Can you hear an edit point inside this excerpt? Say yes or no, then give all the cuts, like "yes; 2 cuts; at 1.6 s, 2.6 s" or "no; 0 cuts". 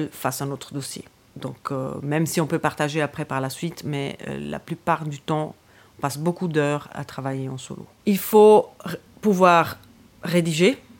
yes; 1 cut; at 8.0 s